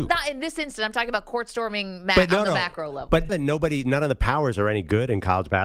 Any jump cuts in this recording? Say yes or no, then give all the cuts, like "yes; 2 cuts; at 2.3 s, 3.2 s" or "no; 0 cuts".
yes; 1 cut; at 3.3 s